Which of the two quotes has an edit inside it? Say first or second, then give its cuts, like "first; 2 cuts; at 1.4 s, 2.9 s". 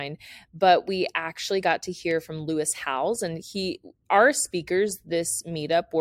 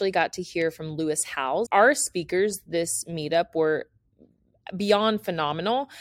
second; 1 cut; at 1.7 s